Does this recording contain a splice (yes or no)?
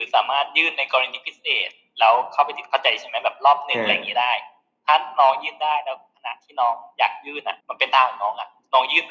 yes